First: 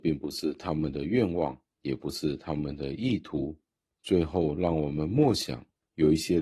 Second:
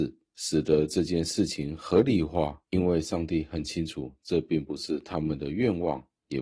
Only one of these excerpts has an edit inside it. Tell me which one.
second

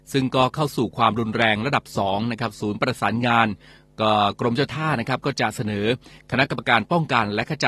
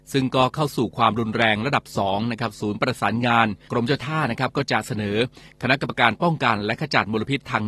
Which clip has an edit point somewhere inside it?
second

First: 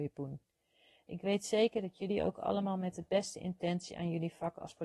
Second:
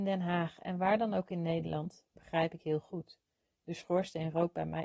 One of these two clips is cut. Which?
second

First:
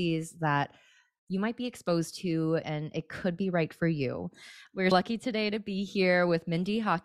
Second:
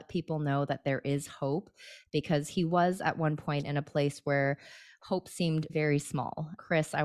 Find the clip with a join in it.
first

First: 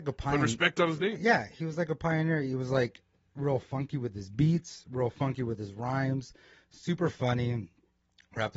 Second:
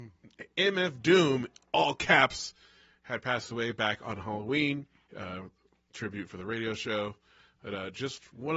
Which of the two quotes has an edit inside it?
second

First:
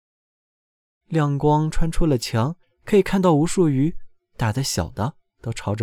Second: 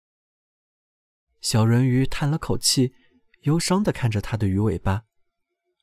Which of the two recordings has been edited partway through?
first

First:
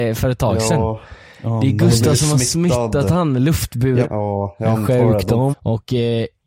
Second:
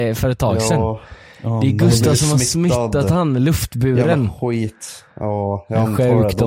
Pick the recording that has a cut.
first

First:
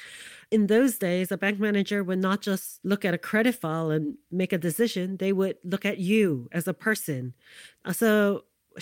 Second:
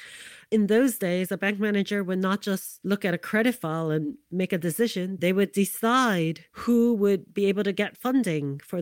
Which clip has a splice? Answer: second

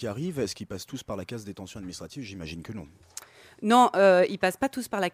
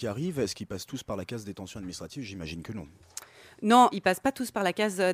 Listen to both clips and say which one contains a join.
second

